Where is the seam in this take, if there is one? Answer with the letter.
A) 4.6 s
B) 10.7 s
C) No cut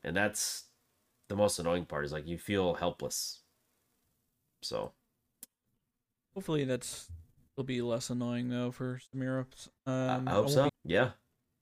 B